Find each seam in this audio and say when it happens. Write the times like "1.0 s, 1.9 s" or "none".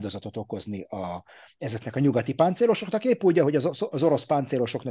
none